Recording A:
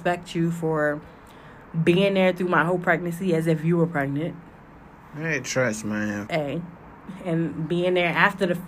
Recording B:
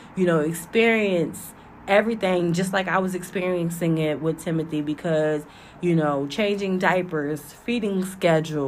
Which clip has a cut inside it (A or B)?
A